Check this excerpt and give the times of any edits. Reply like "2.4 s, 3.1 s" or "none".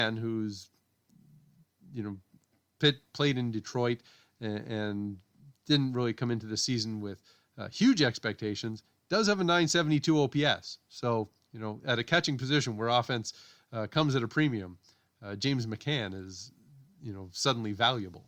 none